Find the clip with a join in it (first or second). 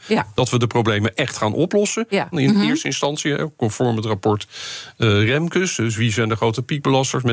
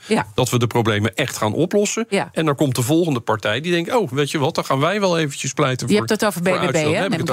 first